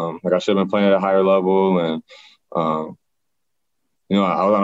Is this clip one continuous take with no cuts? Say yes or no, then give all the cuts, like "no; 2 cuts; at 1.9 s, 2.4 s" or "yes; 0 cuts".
yes; 0 cuts